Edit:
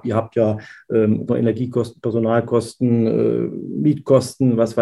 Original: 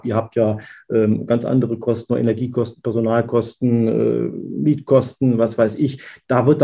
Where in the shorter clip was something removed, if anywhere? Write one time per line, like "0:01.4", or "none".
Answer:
0:01.3

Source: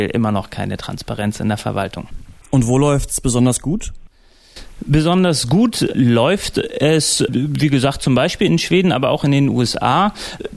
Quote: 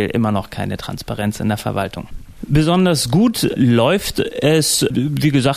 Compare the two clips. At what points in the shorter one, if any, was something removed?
0:02.4

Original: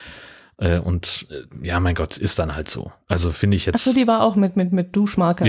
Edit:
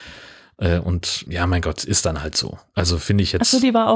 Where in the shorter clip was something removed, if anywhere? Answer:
0:01.3

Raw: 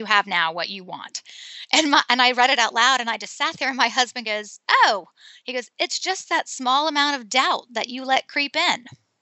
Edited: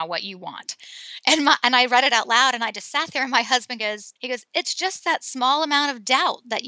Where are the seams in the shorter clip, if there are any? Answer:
0:04.2

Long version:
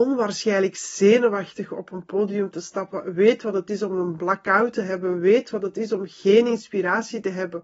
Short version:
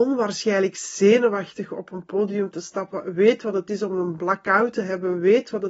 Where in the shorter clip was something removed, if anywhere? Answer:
none

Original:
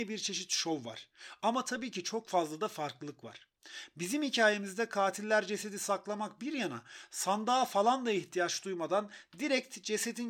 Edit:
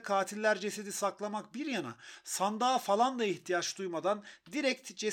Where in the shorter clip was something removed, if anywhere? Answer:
none

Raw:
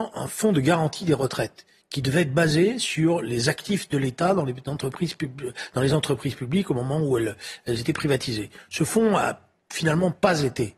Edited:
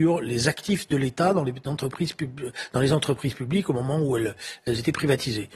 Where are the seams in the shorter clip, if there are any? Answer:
none

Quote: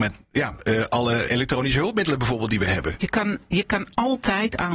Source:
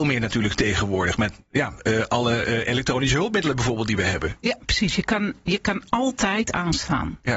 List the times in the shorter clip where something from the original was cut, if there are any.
0:01.3
0:03.0

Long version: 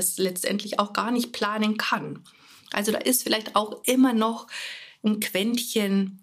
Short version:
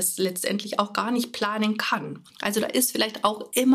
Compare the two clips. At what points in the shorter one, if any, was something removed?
0:02.3

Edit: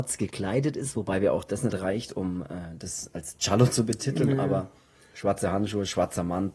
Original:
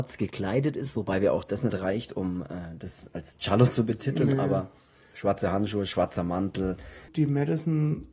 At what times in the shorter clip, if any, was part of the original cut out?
none

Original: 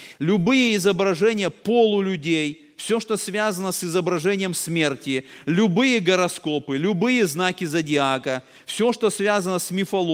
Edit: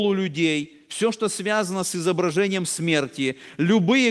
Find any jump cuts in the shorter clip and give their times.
none

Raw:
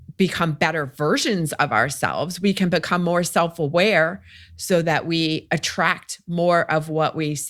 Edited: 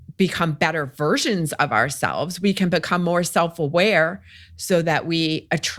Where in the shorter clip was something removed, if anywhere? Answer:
none

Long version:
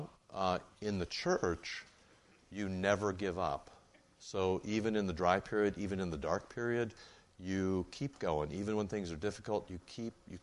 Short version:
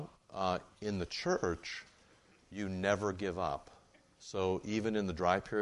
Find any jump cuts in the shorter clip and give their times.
none

